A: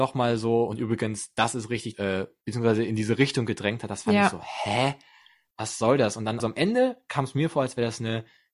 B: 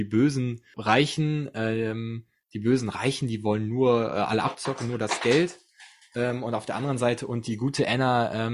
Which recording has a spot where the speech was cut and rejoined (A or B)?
A